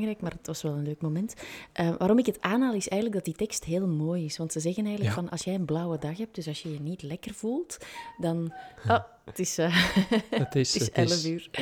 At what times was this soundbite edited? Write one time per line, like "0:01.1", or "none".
none